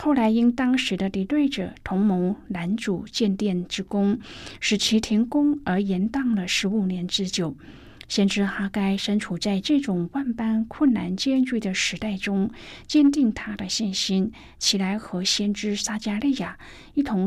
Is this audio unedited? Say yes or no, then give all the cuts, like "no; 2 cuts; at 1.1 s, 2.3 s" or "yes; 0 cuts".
yes; 0 cuts